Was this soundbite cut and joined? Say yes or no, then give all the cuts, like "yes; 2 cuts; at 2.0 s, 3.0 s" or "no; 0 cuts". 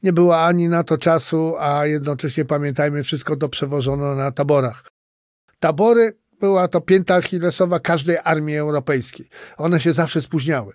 no; 0 cuts